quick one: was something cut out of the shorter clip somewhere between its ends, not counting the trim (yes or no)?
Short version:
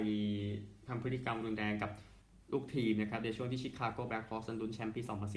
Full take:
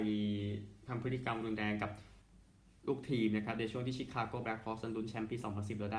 yes